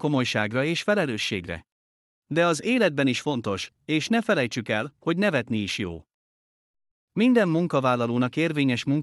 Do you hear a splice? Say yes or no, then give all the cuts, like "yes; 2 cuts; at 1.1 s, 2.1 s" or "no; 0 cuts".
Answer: yes; 2 cuts; at 3.8 s, 6.9 s